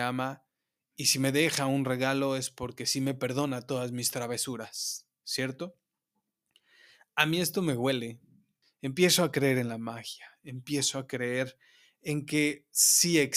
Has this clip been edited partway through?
yes; 1 cut; at 8.6 s

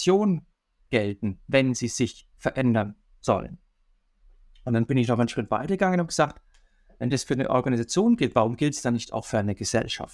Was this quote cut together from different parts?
no; 0 cuts

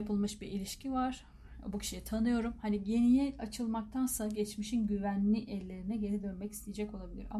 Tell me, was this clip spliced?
no; 0 cuts

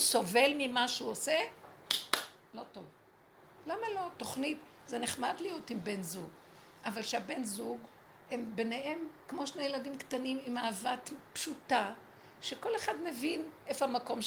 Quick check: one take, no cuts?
no; 1 cut; at 8.2 s

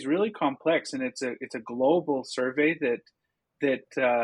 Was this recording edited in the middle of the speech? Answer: no; 0 cuts

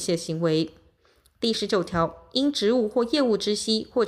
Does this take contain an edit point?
no; 0 cuts

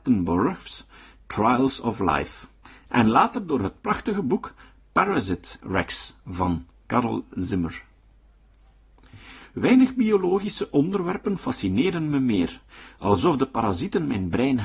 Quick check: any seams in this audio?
yes; 1 cut; at 9.4 s

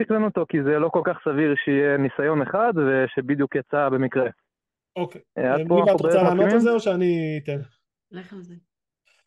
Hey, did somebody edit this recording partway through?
no; 0 cuts

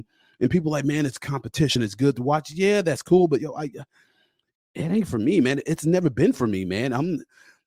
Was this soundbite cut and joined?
no; 0 cuts

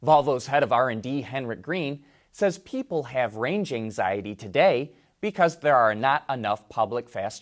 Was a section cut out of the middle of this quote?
no; 0 cuts

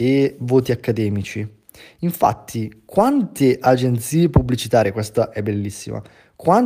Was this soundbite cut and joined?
no; 0 cuts

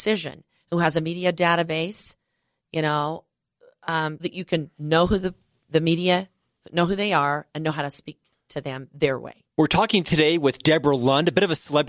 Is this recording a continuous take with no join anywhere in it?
no; 1 cut; at 4.2 s

